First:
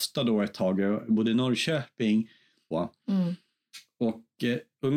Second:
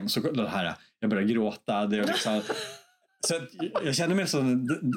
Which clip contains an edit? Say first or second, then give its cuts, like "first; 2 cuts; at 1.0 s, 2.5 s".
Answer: first; 1 cut; at 2.7 s